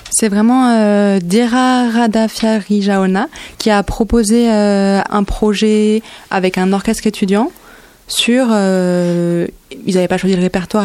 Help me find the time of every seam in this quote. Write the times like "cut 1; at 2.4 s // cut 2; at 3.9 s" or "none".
cut 1; at 3.5 s // cut 2; at 5.1 s